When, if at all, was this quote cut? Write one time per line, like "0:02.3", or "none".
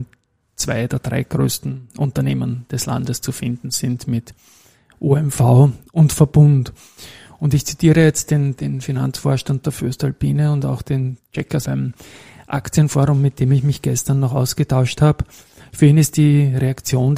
0:08.6
0:11.6